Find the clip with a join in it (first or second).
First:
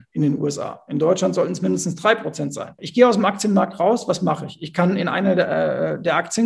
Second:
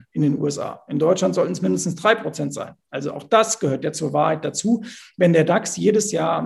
first